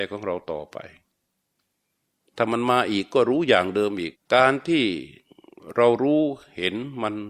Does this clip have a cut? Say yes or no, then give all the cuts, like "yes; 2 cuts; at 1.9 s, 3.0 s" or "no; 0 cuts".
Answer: yes; 1 cut; at 4.1 s